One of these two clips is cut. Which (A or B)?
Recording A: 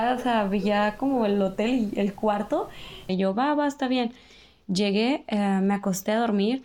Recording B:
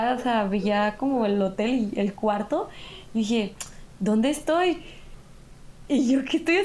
A